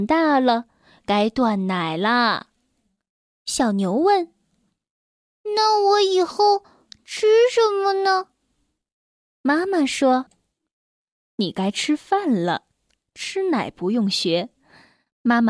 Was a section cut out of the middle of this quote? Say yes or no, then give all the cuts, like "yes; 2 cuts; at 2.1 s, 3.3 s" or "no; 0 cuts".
no; 0 cuts